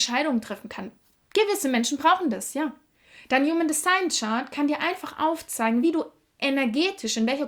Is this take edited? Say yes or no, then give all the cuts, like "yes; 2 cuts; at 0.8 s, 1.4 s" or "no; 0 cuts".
no; 0 cuts